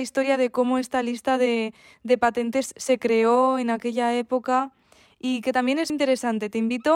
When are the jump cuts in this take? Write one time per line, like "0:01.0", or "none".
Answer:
0:05.9